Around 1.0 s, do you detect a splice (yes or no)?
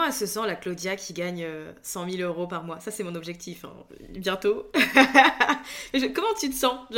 no